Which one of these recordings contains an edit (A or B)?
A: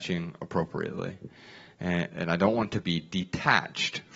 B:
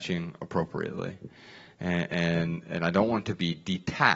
A